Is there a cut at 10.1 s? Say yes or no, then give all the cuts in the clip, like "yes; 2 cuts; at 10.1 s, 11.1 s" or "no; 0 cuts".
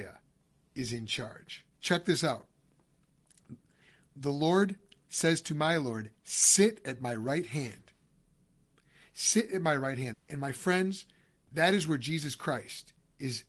yes; 2 cuts; at 1.7 s, 10.1 s